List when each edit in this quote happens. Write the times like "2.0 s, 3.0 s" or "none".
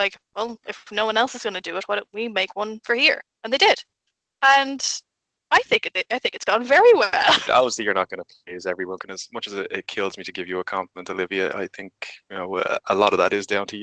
7.5 s, 9.0 s